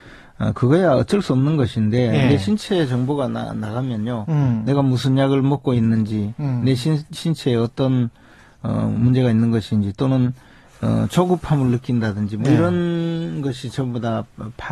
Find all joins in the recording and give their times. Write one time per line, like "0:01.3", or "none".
none